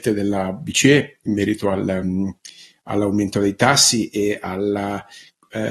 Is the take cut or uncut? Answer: uncut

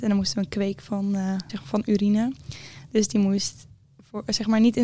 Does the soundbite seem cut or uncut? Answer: cut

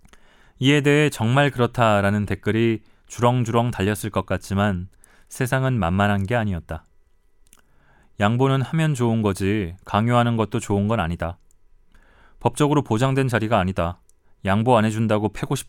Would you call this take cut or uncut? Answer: uncut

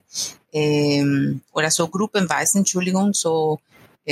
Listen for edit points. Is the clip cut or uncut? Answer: uncut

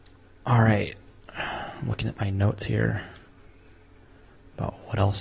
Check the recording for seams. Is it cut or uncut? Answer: uncut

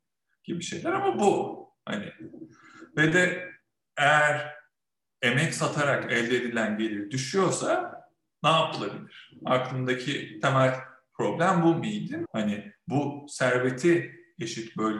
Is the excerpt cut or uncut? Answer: cut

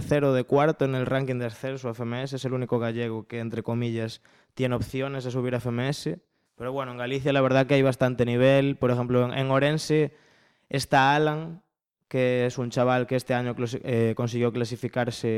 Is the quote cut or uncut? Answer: cut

